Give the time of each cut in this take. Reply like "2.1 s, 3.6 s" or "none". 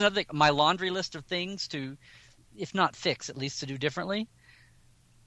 none

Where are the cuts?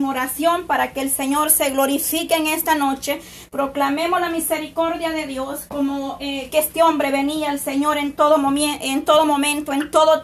6.5 s

